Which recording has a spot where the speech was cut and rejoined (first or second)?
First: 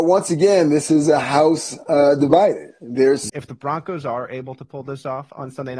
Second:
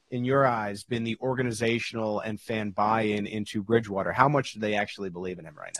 first